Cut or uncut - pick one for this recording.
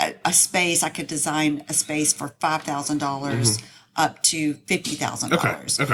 uncut